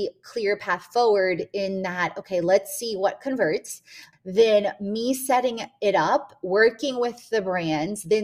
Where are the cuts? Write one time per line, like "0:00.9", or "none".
0:04.1